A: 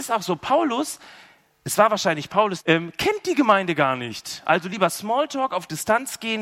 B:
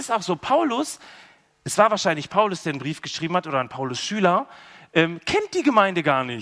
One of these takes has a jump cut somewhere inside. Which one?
A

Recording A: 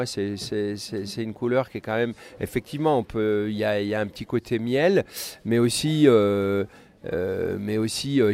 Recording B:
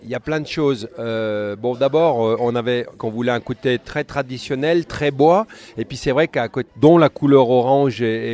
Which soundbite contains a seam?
B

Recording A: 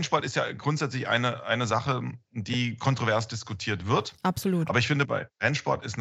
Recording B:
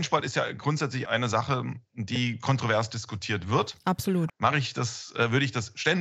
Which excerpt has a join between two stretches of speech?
B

